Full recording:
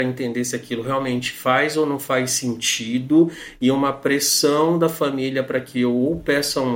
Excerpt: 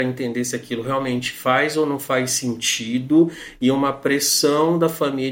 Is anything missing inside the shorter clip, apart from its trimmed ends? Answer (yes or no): no